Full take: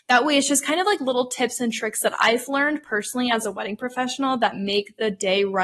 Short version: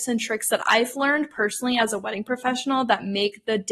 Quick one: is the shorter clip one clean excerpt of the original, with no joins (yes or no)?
yes